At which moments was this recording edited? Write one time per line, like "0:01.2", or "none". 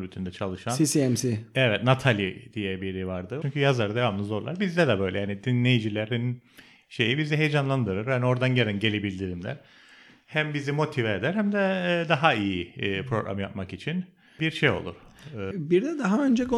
0:03.4
0:15.5